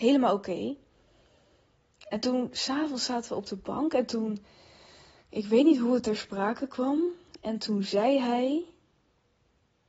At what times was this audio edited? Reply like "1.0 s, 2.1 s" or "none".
none